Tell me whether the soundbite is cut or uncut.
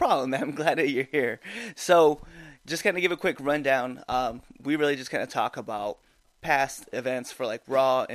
cut